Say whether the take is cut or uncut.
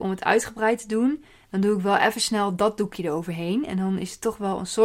uncut